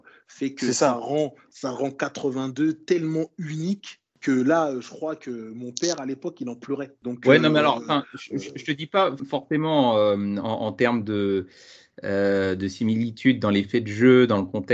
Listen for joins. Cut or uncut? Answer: uncut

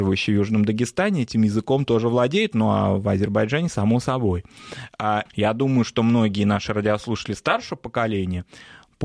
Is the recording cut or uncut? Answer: cut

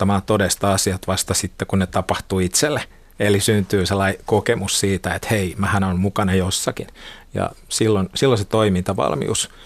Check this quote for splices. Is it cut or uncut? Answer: uncut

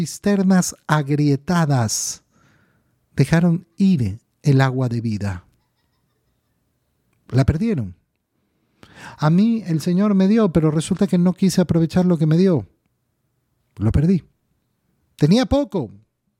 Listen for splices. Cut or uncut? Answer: uncut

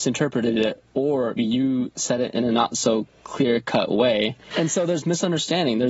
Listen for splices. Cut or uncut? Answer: cut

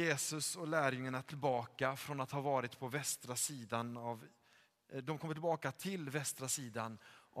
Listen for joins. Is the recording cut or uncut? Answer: uncut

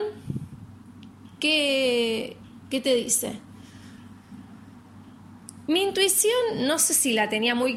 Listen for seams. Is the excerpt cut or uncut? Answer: uncut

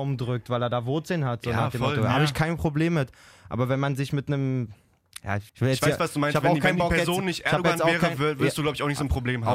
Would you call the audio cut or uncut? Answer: cut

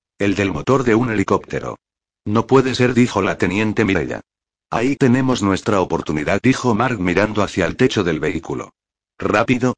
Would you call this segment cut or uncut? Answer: uncut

